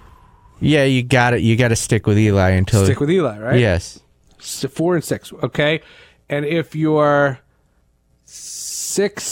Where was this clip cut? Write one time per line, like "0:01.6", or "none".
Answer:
none